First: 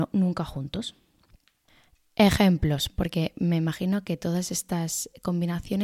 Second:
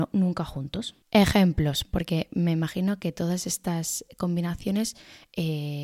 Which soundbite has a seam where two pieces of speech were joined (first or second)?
second